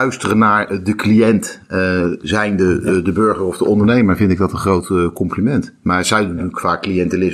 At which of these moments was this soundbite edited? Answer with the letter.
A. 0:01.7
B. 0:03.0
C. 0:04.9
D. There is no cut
D